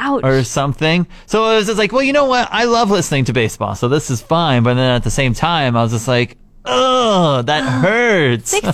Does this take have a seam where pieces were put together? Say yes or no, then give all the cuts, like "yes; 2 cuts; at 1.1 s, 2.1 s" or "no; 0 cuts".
no; 0 cuts